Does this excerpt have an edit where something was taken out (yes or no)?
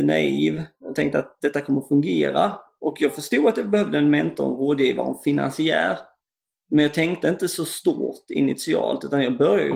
no